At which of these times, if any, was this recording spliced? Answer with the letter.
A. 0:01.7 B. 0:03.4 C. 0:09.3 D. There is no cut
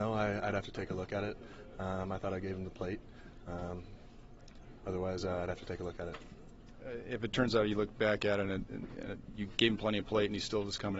D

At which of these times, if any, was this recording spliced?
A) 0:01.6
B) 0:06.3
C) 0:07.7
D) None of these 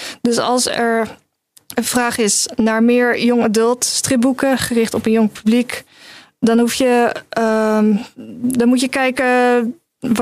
D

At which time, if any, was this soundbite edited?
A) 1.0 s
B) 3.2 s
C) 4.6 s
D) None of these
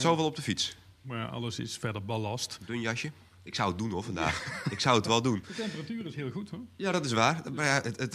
A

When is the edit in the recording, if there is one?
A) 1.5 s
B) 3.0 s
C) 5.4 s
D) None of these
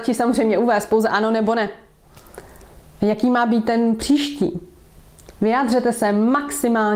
B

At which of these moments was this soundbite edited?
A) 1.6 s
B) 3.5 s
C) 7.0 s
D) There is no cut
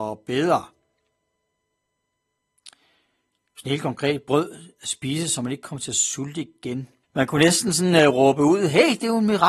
C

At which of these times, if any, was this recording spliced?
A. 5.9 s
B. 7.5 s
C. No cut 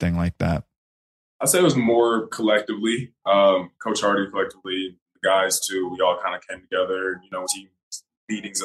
B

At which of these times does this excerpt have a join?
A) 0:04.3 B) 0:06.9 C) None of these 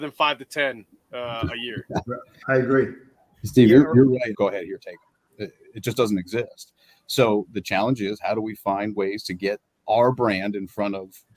A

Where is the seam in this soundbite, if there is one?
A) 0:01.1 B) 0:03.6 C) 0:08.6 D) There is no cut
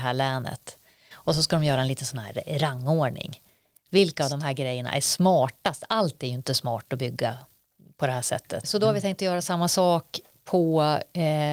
C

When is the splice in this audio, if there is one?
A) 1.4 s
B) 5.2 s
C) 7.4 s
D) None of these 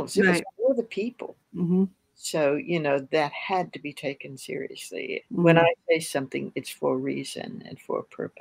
B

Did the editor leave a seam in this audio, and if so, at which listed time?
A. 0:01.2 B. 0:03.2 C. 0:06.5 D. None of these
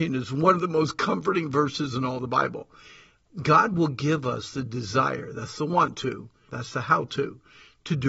C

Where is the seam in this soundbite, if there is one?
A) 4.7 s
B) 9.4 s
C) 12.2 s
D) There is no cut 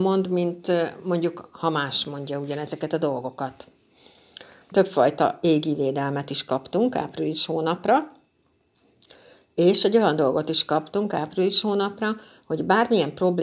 A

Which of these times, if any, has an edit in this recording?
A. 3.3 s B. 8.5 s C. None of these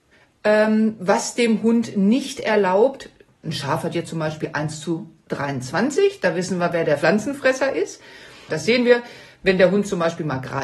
B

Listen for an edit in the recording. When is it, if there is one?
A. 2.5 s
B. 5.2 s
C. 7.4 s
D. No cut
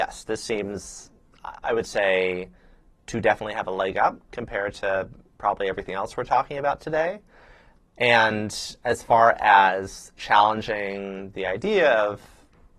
D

